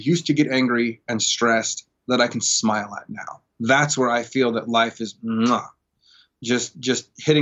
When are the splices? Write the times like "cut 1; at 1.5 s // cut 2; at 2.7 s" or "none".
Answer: none